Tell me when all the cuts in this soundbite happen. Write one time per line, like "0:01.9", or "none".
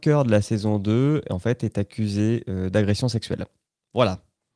none